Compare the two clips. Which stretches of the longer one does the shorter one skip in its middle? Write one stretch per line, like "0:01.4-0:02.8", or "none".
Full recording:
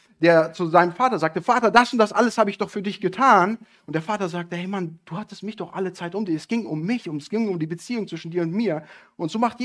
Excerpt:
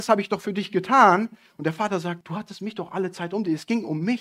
0:04.5-0:05.0

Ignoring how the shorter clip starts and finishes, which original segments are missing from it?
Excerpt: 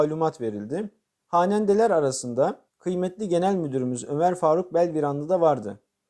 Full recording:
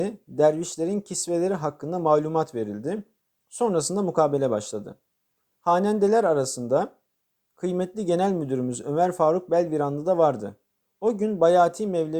0:03.3-0:05.5
0:07.0-0:07.4

